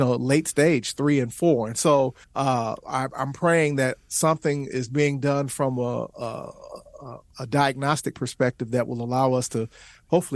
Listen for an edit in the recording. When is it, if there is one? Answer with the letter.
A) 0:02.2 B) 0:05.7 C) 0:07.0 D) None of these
A